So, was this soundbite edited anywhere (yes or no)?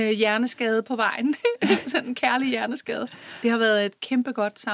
no